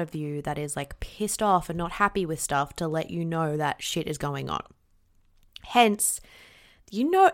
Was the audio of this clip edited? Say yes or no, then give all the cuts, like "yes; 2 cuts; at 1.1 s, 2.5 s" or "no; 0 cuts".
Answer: no; 0 cuts